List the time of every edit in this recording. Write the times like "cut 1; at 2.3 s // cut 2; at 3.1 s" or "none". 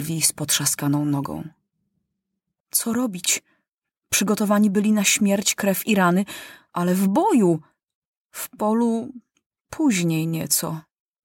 cut 1; at 2.6 s